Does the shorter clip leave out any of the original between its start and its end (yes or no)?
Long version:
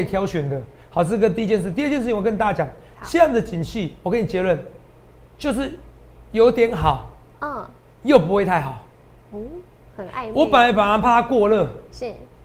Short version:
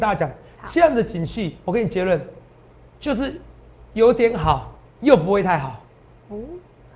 yes